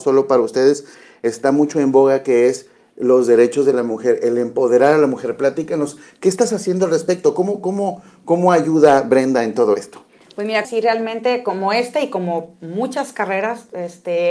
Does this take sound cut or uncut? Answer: cut